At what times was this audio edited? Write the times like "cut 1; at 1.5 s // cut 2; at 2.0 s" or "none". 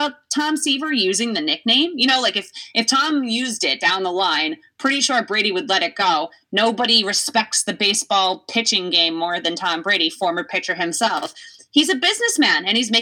none